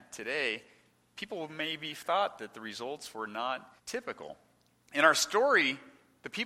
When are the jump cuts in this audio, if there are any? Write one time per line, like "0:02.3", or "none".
0:03.8